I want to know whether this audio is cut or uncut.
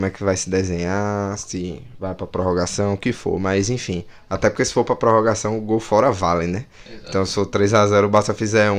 uncut